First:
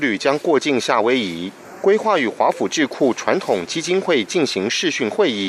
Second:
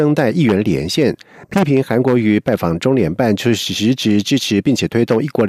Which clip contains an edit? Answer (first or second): second